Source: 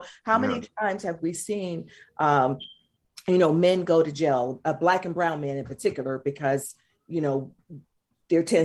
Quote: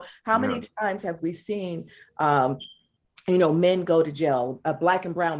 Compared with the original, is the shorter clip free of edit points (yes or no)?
yes